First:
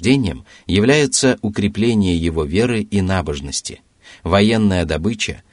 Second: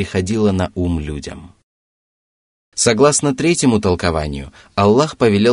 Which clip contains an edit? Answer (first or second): second